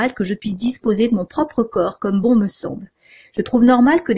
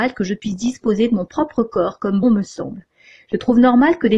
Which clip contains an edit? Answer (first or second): second